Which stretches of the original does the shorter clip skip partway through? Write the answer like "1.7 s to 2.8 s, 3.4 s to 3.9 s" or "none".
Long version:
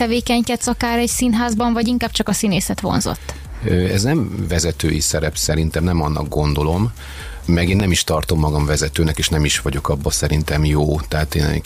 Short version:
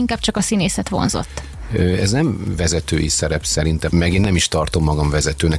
5.8 s to 7.4 s